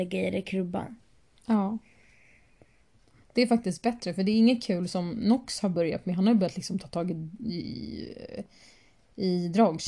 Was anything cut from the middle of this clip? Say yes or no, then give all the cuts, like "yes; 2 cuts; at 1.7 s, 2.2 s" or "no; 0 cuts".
no; 0 cuts